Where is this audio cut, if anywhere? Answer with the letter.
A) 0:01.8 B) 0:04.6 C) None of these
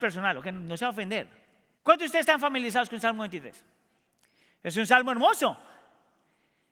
A